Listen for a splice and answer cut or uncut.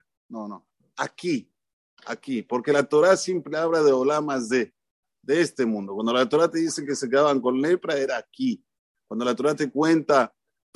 uncut